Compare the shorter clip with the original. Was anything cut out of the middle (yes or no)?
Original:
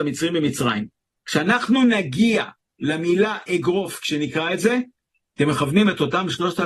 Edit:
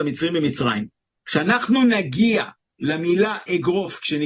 no